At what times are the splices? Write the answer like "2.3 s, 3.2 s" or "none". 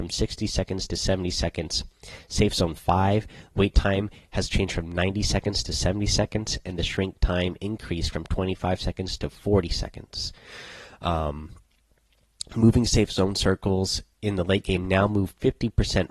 6.6 s